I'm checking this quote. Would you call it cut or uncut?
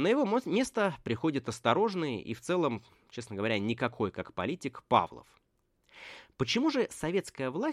uncut